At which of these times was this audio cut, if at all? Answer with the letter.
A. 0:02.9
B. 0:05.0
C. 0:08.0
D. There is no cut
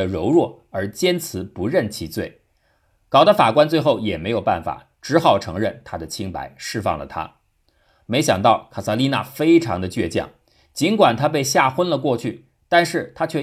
C